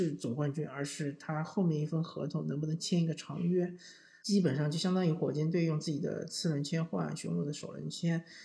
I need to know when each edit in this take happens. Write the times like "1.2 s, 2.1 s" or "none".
4.2 s